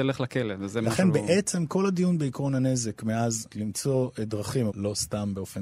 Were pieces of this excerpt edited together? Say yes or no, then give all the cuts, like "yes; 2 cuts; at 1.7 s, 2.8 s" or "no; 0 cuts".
yes; 2 cuts; at 3.5 s, 4.7 s